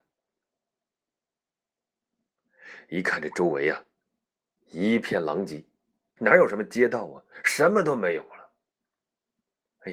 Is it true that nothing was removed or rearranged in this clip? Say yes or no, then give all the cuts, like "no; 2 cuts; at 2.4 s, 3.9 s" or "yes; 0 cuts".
no; 1 cut; at 6.2 s